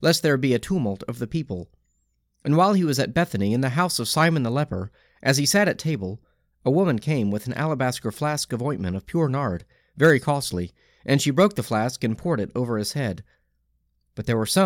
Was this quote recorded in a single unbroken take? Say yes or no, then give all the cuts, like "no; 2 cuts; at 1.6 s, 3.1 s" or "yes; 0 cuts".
yes; 0 cuts